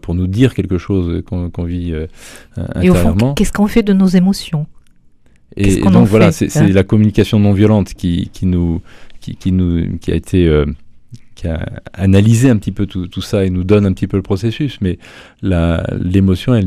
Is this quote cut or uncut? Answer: uncut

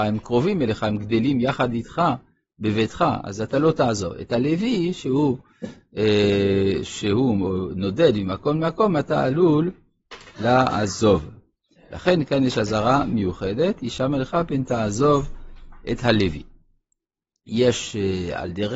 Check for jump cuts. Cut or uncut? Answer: uncut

